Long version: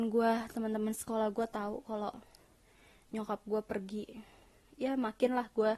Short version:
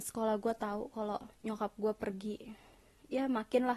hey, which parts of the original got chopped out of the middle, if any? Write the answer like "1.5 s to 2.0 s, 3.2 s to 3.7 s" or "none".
2.3 s to 3.0 s